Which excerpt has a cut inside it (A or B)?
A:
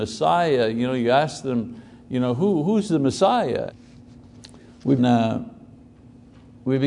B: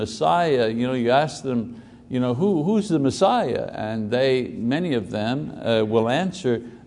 A